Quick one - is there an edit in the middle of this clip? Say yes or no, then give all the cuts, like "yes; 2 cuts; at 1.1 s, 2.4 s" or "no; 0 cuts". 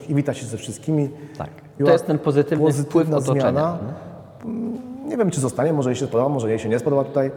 yes; 1 cut; at 1.8 s